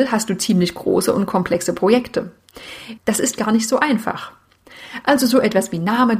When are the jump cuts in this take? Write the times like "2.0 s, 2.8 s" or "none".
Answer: 3.0 s, 5.0 s